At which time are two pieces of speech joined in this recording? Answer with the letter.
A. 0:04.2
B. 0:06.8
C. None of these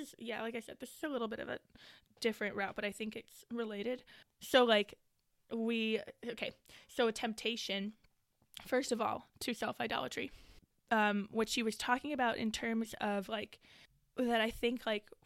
A